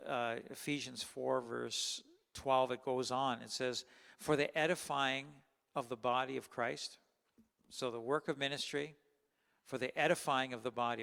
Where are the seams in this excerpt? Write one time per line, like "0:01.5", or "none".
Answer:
none